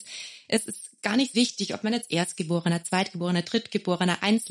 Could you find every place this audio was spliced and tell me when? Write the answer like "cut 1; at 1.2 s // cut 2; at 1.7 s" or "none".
cut 1; at 1.3 s